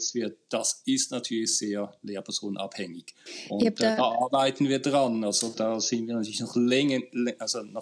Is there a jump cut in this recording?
no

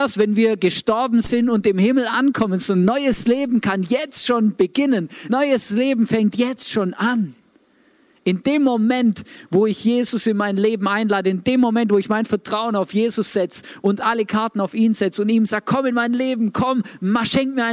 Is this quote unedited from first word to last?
yes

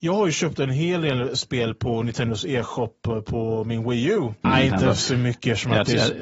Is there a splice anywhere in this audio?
yes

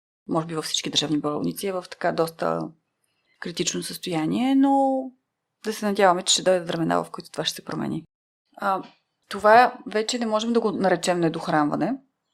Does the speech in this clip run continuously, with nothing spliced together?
no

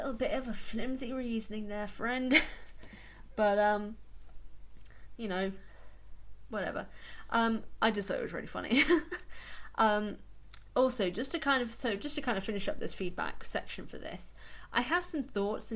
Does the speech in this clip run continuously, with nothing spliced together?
yes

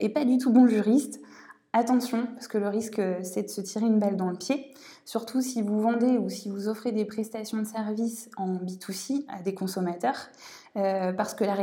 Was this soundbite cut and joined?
yes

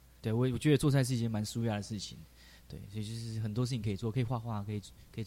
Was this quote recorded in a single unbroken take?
yes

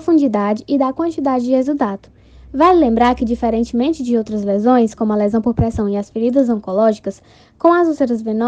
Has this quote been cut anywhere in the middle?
no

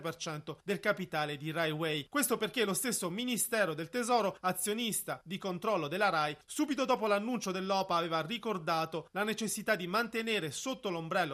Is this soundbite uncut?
yes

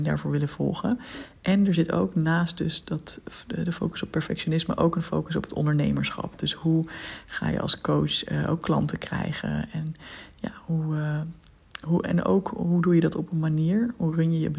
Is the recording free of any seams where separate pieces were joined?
yes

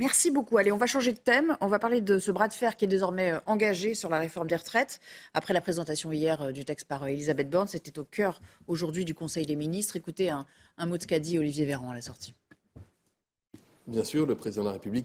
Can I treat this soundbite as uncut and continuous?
yes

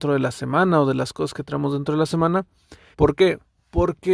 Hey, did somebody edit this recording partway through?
yes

